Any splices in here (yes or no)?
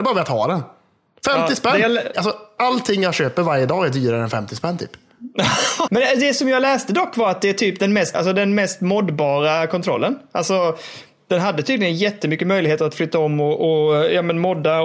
yes